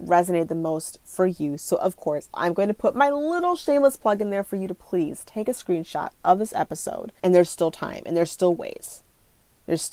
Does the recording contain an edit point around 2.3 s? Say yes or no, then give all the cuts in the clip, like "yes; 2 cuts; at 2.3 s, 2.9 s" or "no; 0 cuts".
yes; 2 cuts; at 2.3 s, 7.2 s